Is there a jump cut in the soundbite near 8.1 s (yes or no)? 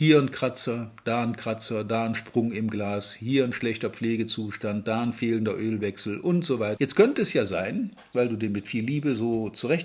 yes